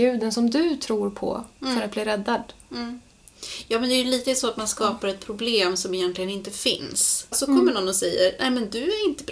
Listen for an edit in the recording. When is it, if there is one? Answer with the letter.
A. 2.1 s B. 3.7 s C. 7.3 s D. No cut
C